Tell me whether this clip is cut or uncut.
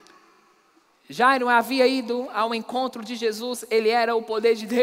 uncut